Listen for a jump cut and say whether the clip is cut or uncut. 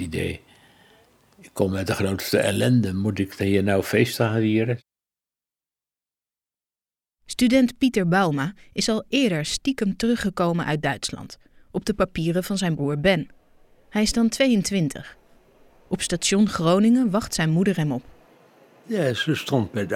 uncut